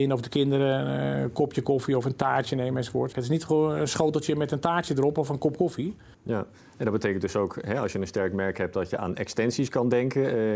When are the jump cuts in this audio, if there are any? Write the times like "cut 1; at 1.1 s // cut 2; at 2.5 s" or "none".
cut 1; at 3.1 s // cut 2; at 6.1 s